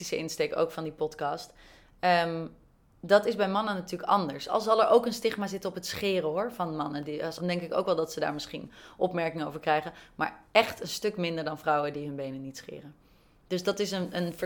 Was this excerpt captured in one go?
no; 1 cut; at 7.4 s

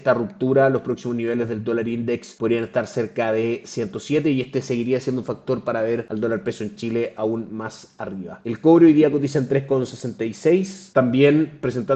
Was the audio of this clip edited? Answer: yes; 1 cut; at 10.9 s

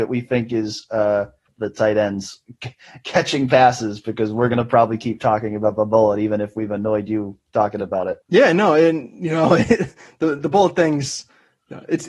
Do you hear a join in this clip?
yes; 3 cuts; at 1.5 s, 8.2 s, 10.4 s

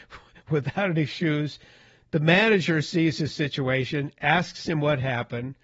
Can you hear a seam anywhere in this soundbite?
no; 0 cuts

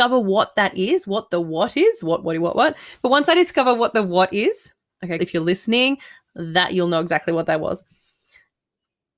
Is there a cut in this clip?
yes; 2 cuts; at 2.2 s, 5.2 s

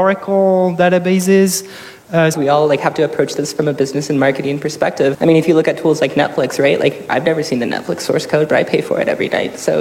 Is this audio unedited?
no; 2 cuts; at 2.3 s, 5.1 s

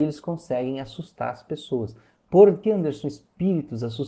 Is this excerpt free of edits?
no; 1 cut; at 2.6 s

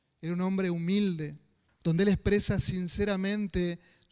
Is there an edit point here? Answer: yes; 1 cut; at 1.7 s

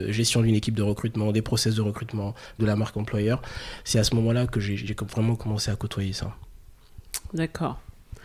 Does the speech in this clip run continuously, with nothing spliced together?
no; 1 cut; at 2.6 s

